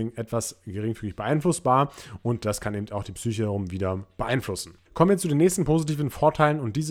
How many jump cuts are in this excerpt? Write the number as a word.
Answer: one